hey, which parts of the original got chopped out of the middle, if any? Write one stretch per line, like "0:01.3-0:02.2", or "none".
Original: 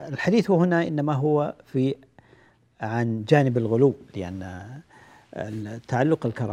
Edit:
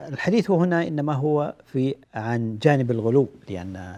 0:02.0-0:02.7